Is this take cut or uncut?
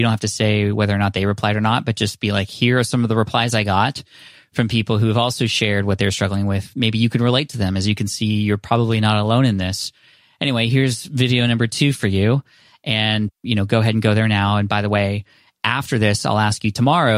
uncut